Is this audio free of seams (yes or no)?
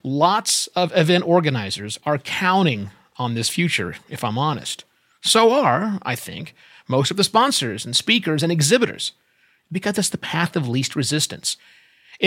yes